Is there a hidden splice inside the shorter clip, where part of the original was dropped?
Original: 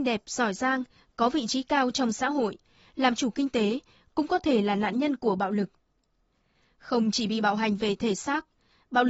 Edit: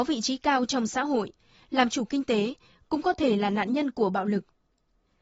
no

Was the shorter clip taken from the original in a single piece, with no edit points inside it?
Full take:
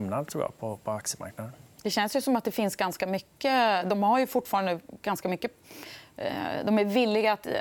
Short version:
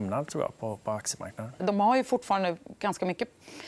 no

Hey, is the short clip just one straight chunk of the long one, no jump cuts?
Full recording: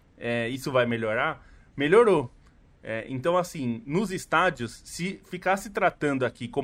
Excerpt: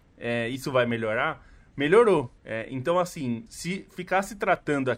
no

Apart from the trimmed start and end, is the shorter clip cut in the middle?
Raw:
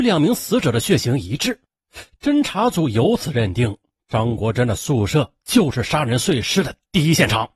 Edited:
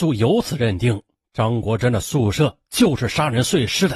no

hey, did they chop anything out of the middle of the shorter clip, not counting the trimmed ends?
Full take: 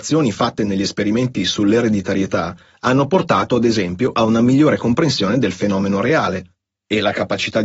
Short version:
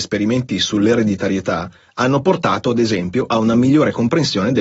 no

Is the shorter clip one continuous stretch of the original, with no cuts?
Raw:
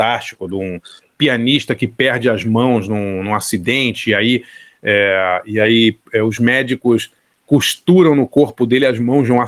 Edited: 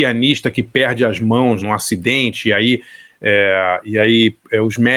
no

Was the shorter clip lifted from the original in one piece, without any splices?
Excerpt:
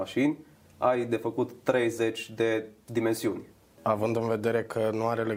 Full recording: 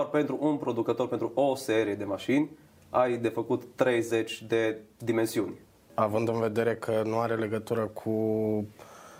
yes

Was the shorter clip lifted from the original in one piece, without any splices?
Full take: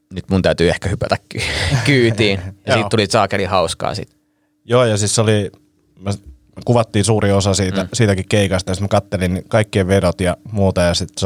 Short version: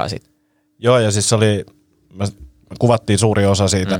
yes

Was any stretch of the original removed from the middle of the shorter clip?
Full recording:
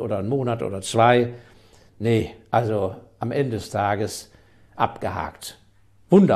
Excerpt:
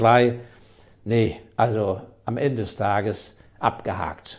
yes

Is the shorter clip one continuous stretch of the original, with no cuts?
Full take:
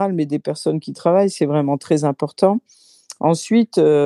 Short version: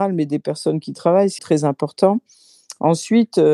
no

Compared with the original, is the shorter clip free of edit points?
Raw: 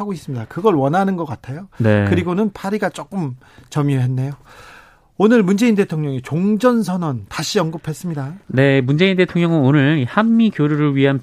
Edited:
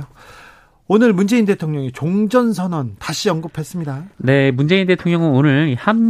yes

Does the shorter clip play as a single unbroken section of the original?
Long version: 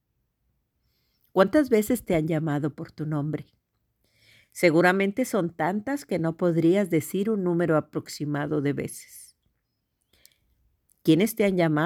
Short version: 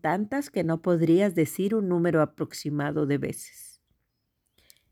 yes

